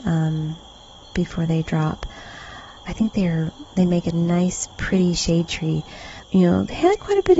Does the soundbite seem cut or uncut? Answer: cut